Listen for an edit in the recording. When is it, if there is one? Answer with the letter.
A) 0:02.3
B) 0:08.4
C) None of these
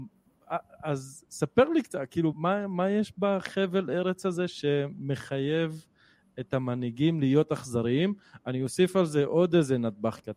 A